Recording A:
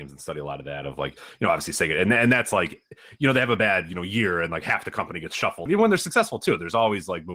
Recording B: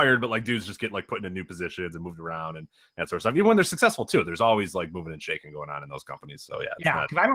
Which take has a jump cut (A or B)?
A